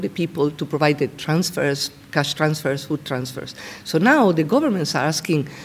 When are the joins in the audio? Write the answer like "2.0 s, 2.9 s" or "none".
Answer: none

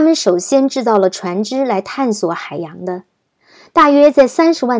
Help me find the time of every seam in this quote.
none

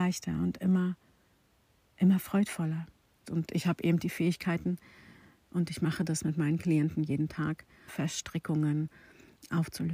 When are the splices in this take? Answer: 3.2 s, 7.9 s

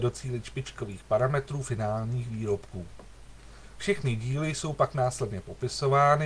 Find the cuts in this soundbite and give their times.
none

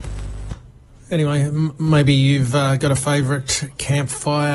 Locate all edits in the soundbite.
none

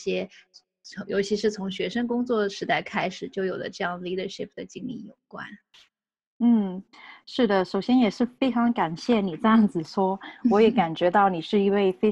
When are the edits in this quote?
none

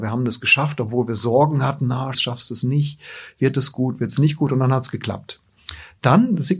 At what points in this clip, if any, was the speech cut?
2.1 s

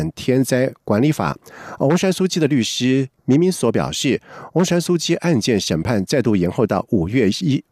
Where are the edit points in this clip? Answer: 3.2 s

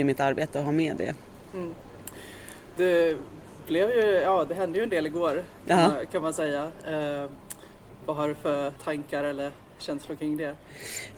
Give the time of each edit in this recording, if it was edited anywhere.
8.8 s

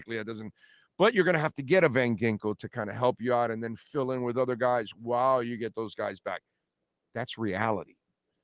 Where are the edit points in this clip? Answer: none

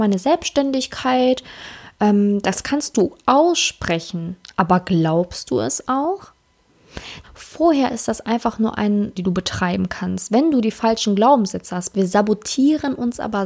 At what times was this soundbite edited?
7.2 s, 9.2 s, 11.9 s

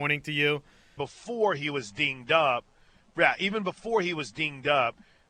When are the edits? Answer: 1.0 s

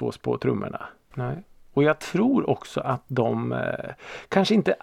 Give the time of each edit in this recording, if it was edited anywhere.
1.1 s

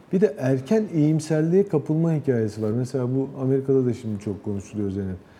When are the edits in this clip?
none

